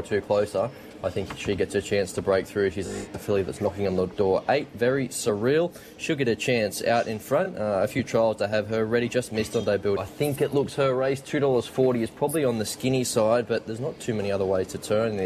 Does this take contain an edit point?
yes; 1 cut; at 10.0 s

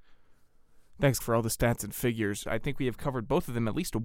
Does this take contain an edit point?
yes; 2 cuts; at 1.2 s, 2.5 s

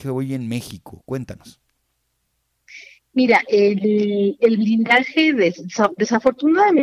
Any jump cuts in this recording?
no; 0 cuts

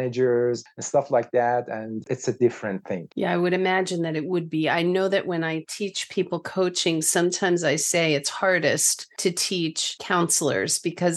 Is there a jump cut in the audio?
yes; 1 cut; at 3.1 s

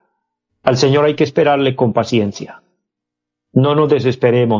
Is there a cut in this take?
no; 0 cuts

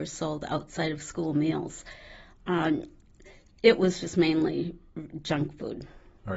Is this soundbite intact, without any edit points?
yes; 0 cuts

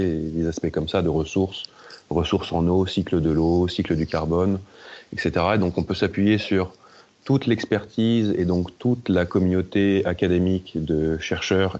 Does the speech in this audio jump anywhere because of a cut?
no; 0 cuts

